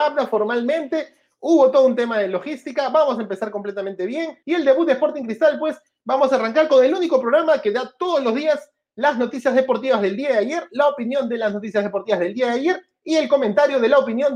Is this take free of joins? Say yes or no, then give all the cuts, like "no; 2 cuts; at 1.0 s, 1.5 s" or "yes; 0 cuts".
no; 1 cut; at 4.4 s